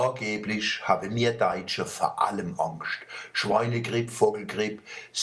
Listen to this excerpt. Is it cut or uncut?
uncut